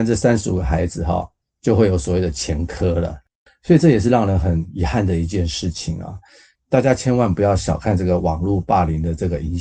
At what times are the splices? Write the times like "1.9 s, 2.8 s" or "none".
3.5 s